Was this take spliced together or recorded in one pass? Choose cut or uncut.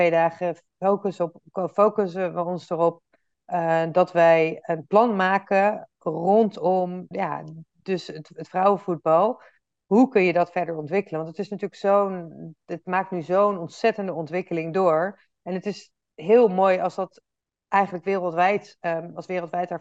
cut